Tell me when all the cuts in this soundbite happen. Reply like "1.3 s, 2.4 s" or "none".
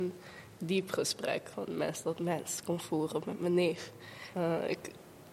1.5 s, 4.3 s